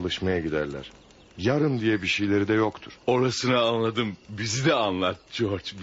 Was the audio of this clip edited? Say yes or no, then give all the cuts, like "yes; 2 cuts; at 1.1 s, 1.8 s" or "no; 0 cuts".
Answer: no; 0 cuts